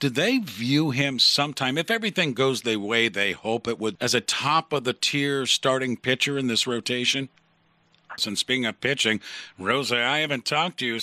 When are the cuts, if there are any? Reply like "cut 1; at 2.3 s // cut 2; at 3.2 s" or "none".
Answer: cut 1; at 4.0 s // cut 2; at 8.2 s